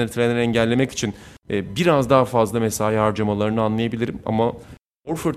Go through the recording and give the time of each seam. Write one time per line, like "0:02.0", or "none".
0:01.4